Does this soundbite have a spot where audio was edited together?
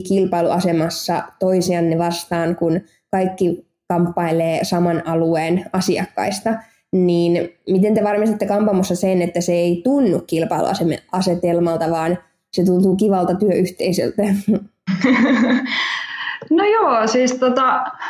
no; 0 cuts

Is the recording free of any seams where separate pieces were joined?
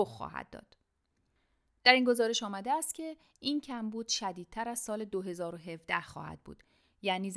yes; 0 cuts

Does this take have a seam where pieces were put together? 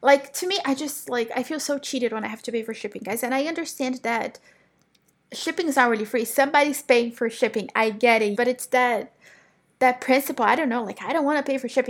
yes; 1 cut; at 8.3 s

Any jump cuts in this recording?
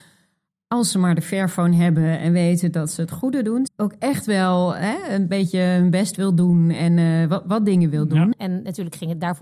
yes; 2 cuts; at 3.7 s, 8.3 s

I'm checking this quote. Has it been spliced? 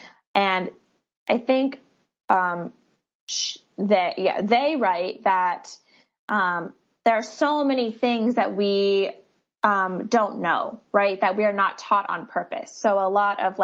no; 0 cuts

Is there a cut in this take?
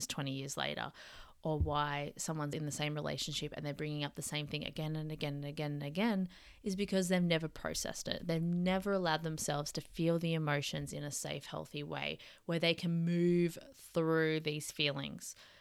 yes; 1 cut; at 2.5 s

